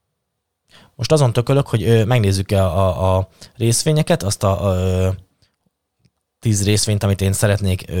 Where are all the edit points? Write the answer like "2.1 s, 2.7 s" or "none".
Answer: none